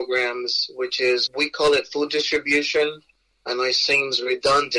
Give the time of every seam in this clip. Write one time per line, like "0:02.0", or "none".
0:01.3